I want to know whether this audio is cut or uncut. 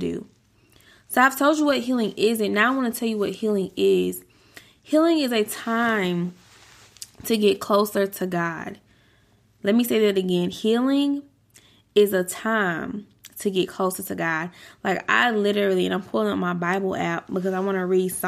uncut